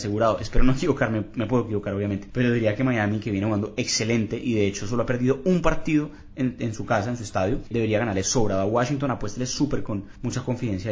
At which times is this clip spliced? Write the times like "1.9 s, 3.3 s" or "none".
none